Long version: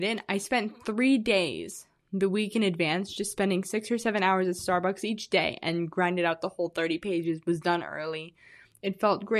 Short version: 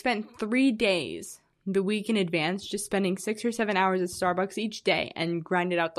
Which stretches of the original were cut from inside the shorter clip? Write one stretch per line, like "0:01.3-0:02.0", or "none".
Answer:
none